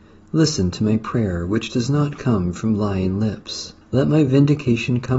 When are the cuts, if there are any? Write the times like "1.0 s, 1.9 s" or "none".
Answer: 3.8 s